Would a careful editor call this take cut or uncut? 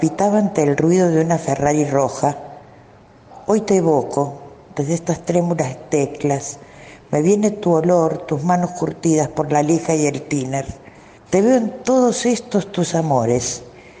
uncut